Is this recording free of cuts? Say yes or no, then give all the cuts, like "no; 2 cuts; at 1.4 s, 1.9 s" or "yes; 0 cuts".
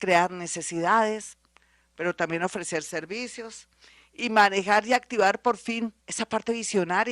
no; 1 cut; at 6.0 s